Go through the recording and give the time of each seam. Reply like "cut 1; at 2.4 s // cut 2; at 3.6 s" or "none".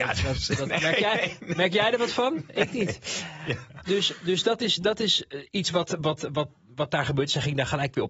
none

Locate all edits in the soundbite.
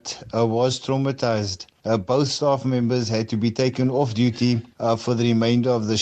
none

